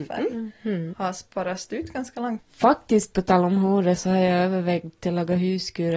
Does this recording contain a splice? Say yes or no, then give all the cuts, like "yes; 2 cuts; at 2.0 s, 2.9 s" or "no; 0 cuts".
yes; 2 cuts; at 0.9 s, 2.4 s